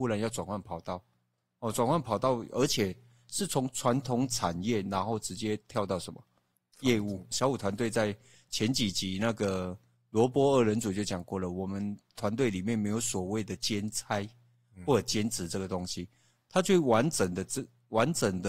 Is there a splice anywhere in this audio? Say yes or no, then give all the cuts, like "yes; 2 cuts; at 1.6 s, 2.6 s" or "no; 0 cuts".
yes; 1 cut; at 7.3 s